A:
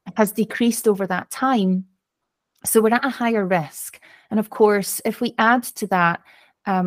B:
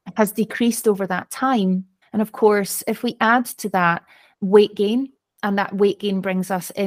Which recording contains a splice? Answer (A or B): B